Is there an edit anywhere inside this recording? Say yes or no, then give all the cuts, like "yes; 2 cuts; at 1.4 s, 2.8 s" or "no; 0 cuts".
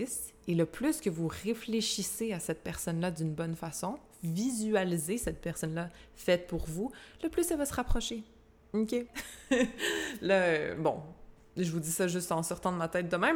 yes; 1 cut; at 9.1 s